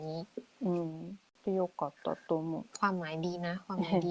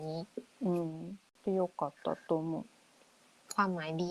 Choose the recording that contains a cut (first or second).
first